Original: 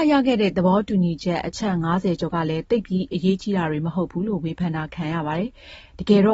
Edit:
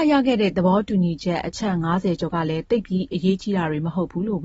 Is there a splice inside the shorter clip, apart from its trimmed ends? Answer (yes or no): no